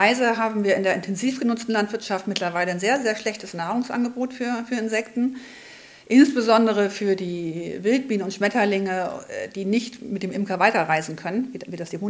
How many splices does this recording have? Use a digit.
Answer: 0